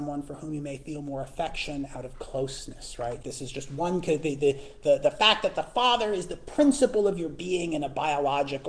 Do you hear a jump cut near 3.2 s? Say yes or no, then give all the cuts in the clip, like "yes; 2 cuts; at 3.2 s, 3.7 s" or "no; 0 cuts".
yes; 1 cut; at 3.2 s